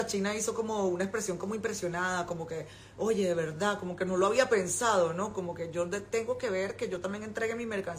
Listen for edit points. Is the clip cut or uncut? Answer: uncut